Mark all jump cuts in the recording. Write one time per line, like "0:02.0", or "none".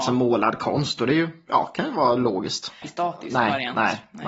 0:02.8